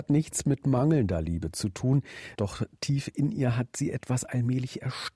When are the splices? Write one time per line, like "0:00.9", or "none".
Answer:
0:02.4